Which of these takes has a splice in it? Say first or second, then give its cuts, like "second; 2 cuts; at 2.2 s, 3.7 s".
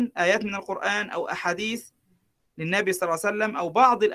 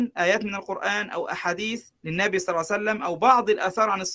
second; 1 cut; at 2.0 s